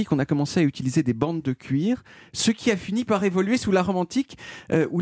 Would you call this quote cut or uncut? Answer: uncut